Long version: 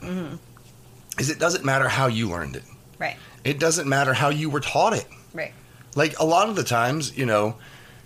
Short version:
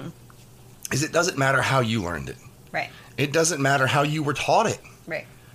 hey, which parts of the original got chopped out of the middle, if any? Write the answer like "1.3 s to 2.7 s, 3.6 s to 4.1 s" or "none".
none